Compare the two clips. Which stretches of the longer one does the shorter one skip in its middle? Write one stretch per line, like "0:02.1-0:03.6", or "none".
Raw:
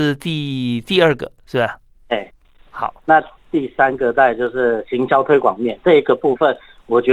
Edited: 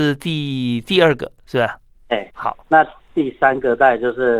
0:02.3-0:02.7